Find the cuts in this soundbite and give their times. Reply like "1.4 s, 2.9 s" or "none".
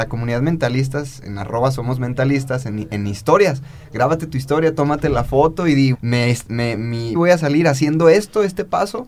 5.9 s, 7.1 s